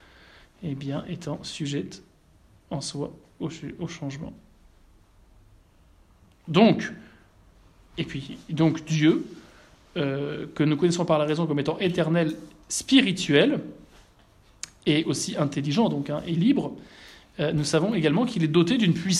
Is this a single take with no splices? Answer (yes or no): yes